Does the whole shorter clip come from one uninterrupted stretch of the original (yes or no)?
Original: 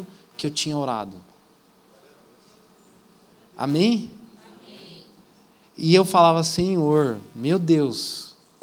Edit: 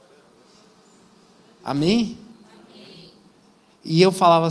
yes